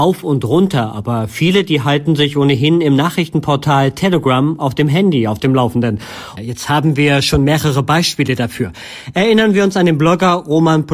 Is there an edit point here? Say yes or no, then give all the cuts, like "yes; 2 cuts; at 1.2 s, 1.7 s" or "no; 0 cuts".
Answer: yes; 1 cut; at 6.4 s